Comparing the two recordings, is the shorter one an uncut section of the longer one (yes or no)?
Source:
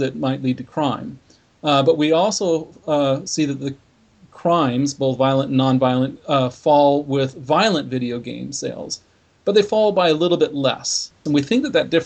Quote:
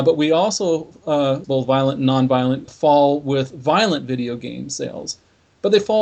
no